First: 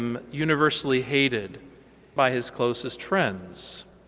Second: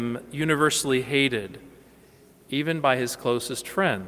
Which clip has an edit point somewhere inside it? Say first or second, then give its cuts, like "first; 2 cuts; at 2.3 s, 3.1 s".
first; 1 cut; at 2.2 s